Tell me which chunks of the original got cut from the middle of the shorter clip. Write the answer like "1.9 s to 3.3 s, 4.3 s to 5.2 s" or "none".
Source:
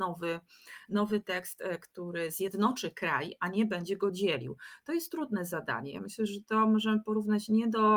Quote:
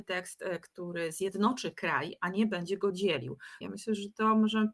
4.8 s to 5.9 s